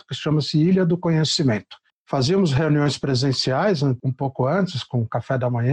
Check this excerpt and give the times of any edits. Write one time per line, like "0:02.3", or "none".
0:01.9